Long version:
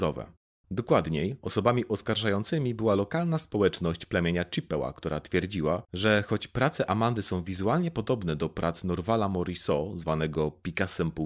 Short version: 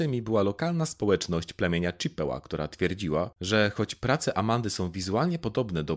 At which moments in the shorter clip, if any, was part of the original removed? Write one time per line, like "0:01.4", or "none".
none